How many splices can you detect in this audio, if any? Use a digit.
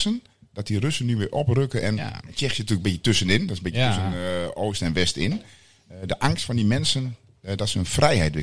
0